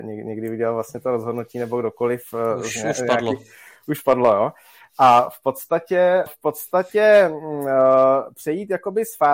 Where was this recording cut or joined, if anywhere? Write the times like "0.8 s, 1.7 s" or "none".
6.3 s